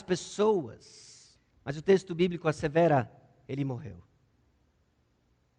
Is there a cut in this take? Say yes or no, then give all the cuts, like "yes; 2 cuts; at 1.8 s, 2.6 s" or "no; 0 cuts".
yes; 1 cut; at 1.5 s